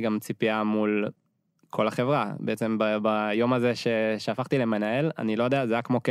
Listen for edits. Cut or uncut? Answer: uncut